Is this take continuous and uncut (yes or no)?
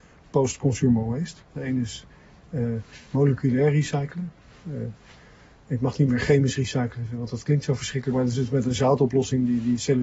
no